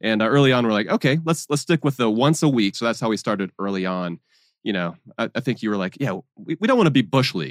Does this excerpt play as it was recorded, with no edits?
no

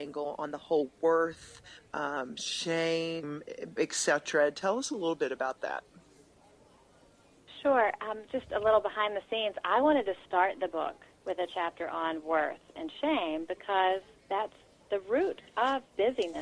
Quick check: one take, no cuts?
no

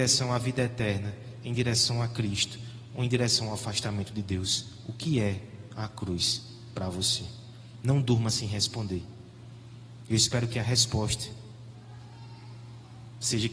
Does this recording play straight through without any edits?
yes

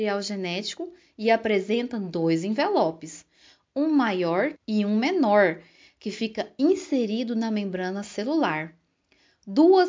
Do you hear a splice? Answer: yes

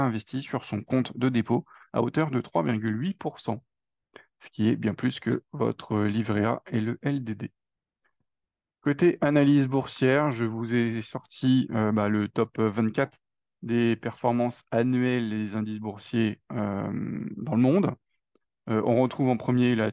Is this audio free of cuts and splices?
yes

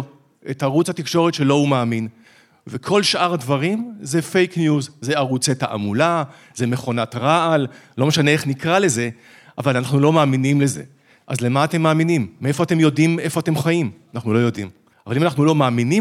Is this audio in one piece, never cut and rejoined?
no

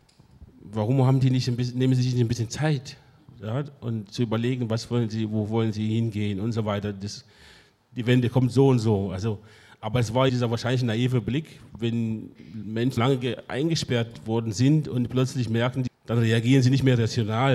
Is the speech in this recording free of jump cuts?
no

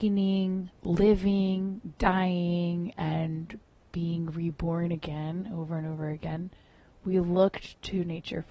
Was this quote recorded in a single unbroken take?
yes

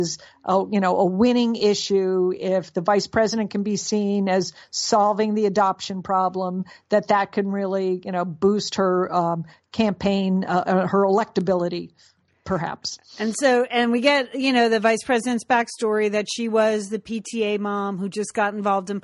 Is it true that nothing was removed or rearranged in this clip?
yes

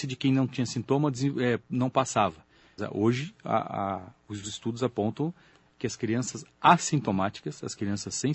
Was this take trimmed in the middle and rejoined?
yes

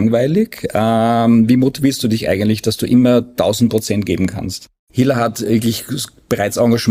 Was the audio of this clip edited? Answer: yes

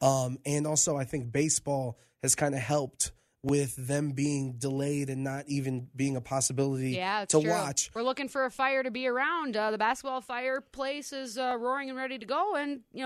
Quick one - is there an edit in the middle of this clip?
no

